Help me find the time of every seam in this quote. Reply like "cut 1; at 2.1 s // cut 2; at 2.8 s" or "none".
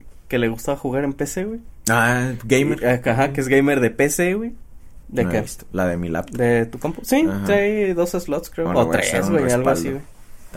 cut 1; at 5.0 s